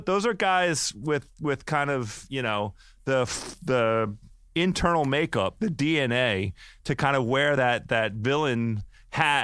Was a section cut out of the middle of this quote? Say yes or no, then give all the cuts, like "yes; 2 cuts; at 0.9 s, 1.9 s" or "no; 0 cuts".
no; 0 cuts